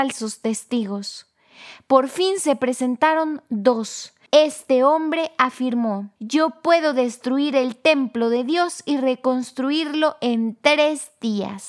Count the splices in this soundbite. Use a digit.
2